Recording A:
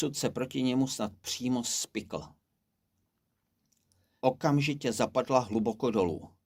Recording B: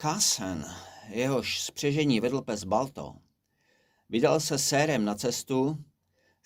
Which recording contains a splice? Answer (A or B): A